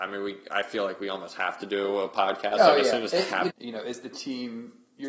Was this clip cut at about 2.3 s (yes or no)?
no